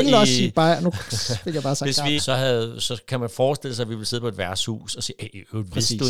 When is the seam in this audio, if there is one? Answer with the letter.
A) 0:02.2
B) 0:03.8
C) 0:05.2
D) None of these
A